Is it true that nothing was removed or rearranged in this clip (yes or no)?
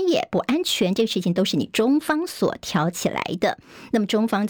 yes